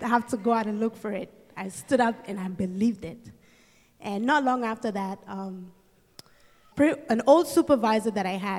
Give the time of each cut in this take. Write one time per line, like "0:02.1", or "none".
0:06.7